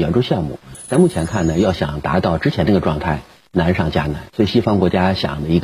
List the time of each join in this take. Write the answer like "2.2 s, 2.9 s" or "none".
4.3 s